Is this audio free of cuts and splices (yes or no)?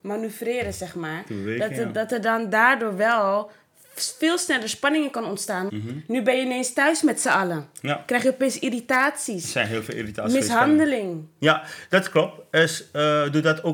no